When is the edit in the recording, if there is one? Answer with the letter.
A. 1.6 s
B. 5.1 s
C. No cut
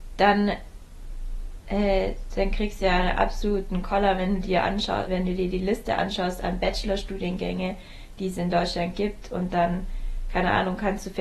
B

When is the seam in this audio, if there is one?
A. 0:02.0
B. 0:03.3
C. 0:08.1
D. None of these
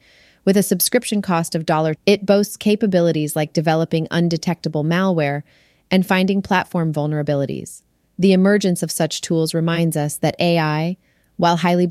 A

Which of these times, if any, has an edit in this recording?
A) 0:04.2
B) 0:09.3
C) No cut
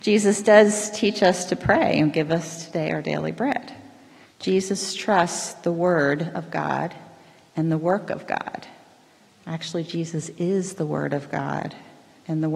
A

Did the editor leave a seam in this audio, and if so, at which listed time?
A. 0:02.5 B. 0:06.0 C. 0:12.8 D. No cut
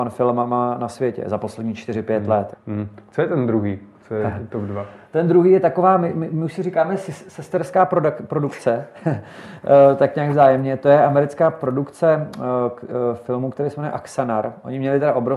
A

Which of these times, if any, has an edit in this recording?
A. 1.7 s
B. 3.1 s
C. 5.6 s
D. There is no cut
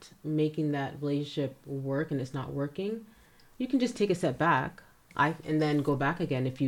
D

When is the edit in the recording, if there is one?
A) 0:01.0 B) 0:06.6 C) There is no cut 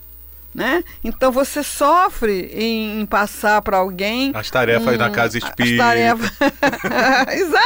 C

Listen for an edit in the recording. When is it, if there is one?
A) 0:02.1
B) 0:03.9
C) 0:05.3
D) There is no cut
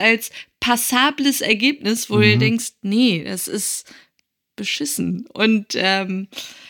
D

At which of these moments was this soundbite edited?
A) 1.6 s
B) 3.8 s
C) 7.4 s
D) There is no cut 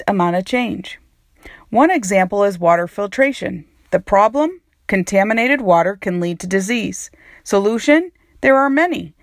D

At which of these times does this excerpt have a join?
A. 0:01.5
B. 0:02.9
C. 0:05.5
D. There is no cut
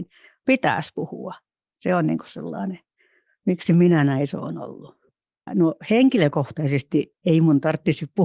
C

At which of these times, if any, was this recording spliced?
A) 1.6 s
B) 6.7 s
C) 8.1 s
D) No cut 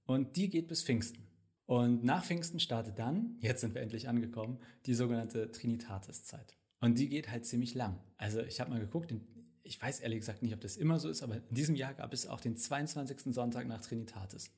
A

